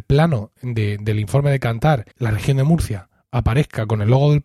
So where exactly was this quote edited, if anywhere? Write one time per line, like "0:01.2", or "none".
0:02.1